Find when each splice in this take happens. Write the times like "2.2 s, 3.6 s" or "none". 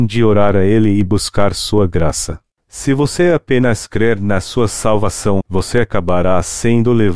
2.6 s, 5.4 s